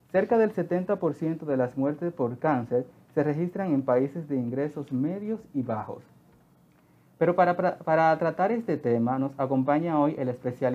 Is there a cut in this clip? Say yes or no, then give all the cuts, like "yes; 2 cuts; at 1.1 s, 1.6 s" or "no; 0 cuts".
no; 0 cuts